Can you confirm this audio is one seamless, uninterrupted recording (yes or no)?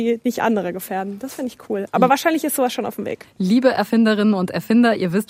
yes